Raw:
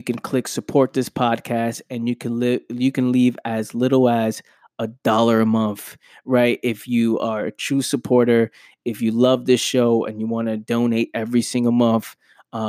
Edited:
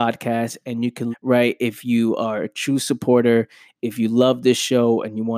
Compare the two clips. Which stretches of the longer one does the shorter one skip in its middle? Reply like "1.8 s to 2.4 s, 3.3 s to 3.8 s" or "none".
2.3 s to 6.1 s